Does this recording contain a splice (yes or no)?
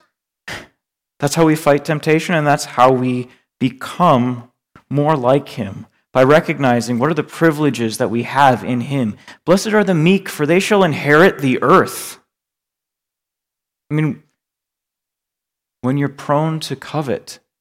no